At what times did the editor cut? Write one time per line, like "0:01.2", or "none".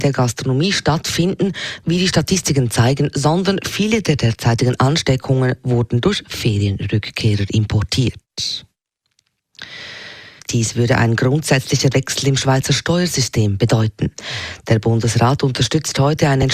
0:10.4